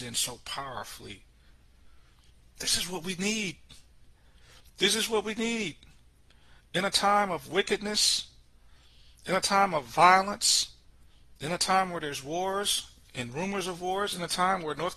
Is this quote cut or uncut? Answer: uncut